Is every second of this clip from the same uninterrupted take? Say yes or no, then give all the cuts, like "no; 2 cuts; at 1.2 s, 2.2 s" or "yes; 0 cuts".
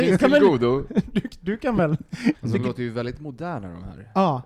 no; 1 cut; at 2.3 s